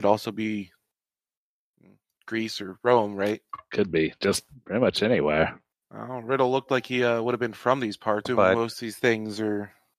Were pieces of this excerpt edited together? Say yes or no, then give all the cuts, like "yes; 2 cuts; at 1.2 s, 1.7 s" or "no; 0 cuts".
yes; 1 cut; at 8.2 s